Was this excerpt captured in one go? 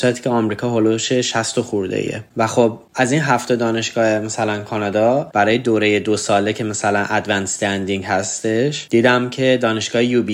yes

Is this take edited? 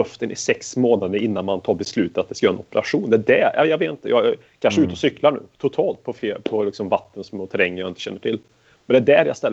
no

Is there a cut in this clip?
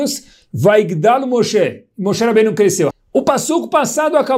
yes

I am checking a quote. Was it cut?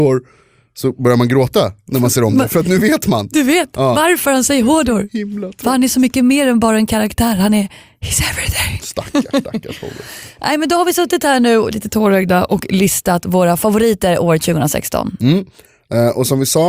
no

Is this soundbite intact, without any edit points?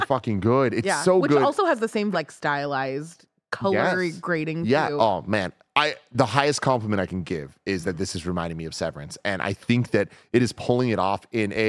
no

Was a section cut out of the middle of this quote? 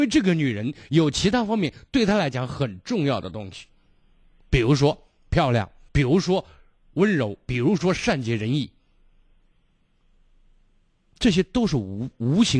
yes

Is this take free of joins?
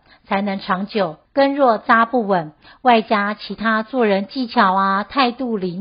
no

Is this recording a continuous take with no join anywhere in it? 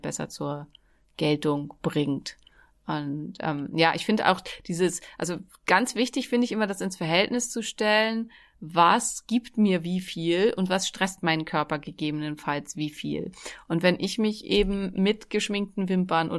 yes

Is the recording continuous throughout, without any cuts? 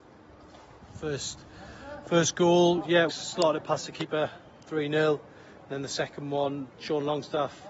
no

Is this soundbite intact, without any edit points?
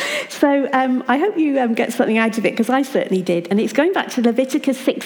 yes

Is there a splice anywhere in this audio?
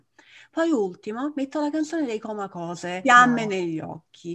yes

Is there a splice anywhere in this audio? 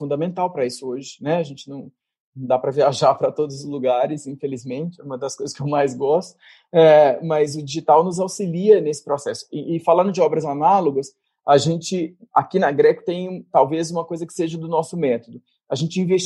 no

